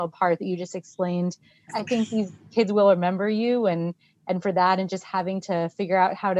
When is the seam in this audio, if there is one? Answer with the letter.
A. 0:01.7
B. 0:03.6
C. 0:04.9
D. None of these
A